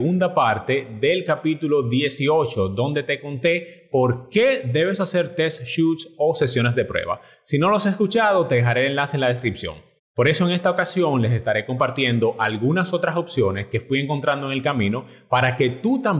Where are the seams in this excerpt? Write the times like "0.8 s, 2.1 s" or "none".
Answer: 10.0 s

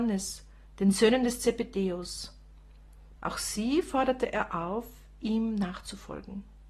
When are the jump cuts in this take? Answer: 3.2 s

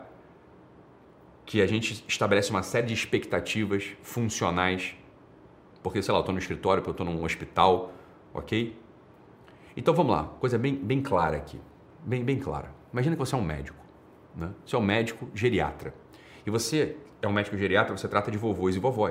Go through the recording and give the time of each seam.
none

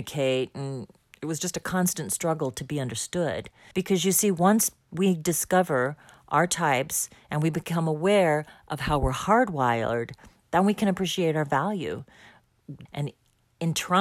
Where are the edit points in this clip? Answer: 3.7 s, 12.9 s

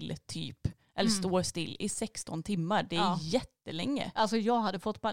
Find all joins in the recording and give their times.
none

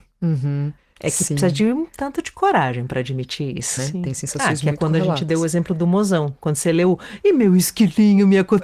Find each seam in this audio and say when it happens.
3.8 s

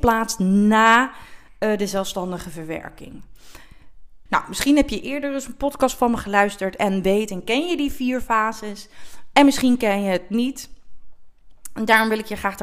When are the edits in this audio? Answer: 4.3 s

